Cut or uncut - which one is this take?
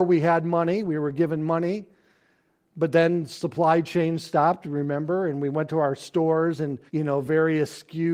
cut